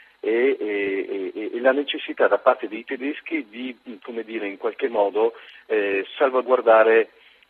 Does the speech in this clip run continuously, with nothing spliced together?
yes; 0 cuts

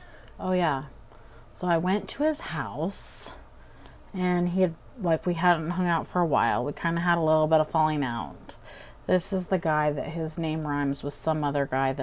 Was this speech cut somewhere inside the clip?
no; 0 cuts

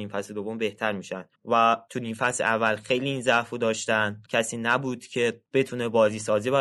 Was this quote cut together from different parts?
yes; 2 cuts; at 1.3 s, 4.2 s

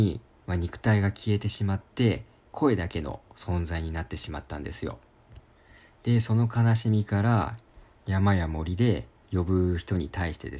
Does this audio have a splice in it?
no; 0 cuts

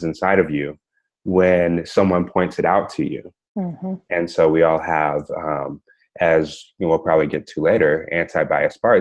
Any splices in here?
no; 0 cuts

